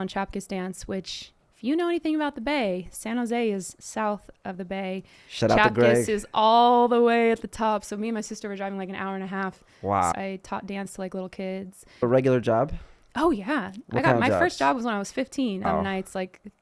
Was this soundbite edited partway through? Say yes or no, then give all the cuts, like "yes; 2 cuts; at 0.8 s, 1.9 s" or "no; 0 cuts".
yes; 3 cuts; at 10.1 s, 12.0 s, 15.6 s